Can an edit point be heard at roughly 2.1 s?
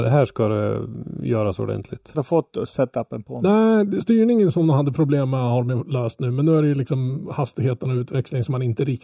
yes; 1 cut; at 2.1 s

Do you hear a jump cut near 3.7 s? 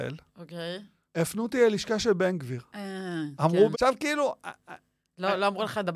yes; 2 cuts; at 1.1 s, 3.7 s

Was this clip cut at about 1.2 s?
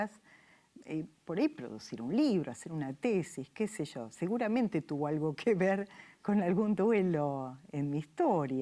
yes; 1 cut; at 1.2 s

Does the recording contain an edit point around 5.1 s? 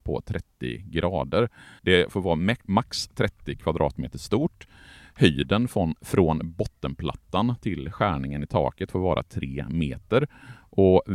no; 1 cut; at 1.8 s

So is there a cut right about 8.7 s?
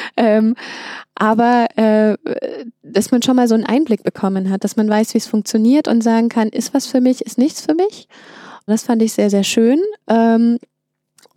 yes; 1 cut; at 8.7 s

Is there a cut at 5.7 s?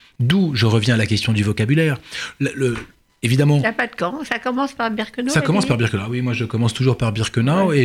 no; 1 cut; at 4.2 s

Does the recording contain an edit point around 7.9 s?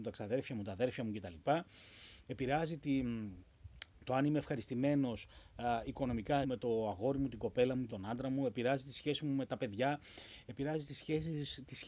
yes; 2 cuts; at 6.4 s, 7.9 s

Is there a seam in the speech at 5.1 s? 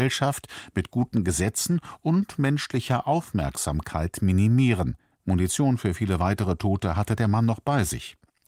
yes; 1 cut; at 5.1 s

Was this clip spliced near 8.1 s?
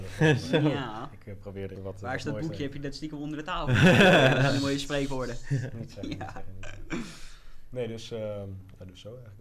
no; 1 cut; at 1.8 s

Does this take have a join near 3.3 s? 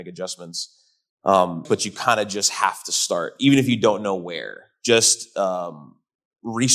no; 1 cut; at 1.7 s

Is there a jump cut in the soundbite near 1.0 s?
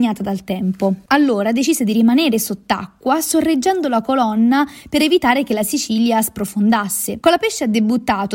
no; 1 cut; at 7.2 s

